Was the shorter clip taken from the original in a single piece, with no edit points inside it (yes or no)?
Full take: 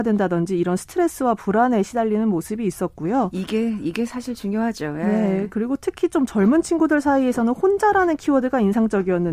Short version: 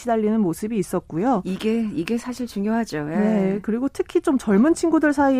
yes